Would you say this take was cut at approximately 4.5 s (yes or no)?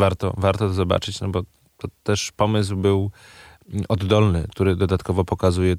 yes